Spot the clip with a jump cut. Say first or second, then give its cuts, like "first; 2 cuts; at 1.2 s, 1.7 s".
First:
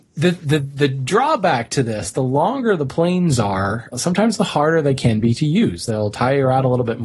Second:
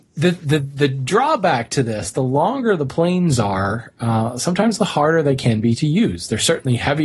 first; 2 cuts; at 3.9 s, 5.9 s